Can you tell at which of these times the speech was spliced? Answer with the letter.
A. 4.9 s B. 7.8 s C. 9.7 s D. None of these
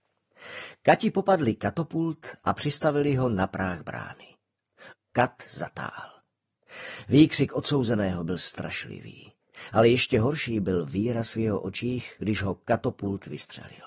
A